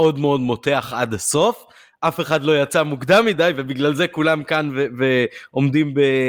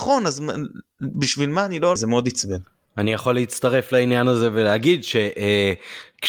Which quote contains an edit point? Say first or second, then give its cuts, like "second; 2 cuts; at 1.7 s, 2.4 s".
second; 1 cut; at 2.0 s